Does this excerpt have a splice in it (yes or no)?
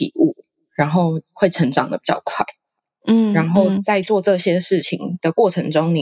no